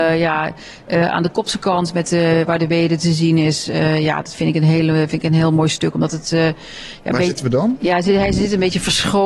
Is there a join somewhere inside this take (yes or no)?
no